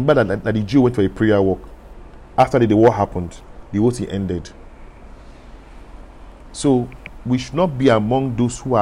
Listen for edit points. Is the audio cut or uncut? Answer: uncut